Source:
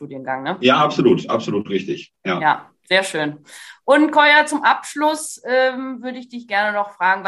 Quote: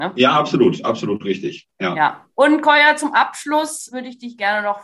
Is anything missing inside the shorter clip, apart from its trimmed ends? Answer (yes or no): yes